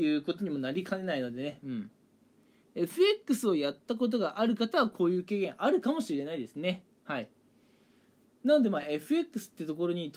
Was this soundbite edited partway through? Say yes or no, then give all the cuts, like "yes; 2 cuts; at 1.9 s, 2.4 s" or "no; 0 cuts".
no; 0 cuts